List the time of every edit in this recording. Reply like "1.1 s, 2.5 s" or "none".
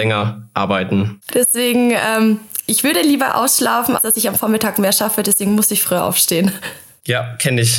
1.3 s, 4.0 s